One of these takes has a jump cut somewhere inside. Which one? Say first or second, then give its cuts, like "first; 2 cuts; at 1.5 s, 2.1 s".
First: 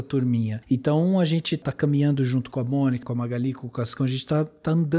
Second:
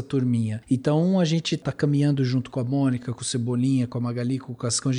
first; 1 cut; at 3.0 s